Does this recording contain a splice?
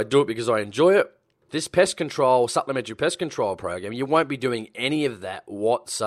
yes; 1 cut; at 1.5 s

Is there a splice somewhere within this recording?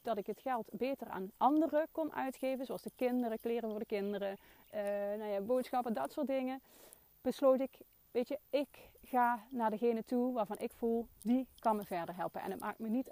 no; 0 cuts

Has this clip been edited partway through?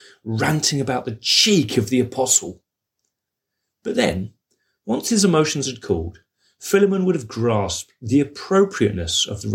no; 0 cuts

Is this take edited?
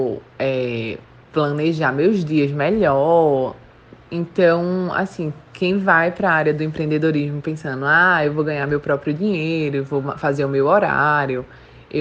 yes; 1 cut; at 4.0 s

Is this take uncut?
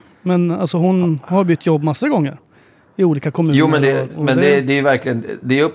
no; 1 cut; at 4.1 s

